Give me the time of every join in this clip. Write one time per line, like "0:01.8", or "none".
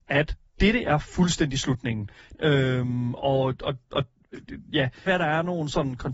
0:02.3
0:05.1